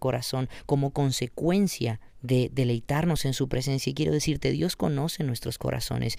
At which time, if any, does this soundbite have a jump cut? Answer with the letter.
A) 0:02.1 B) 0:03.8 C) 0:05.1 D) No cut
A